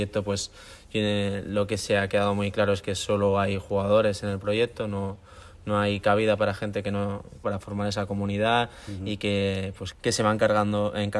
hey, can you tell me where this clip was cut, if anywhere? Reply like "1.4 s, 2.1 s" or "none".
7.4 s, 9.9 s